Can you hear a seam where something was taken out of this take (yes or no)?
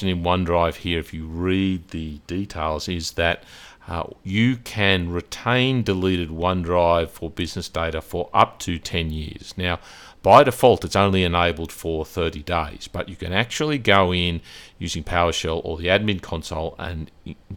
no